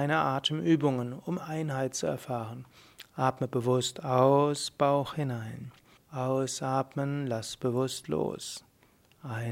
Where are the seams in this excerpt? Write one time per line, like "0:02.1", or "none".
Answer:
0:03.1
0:06.0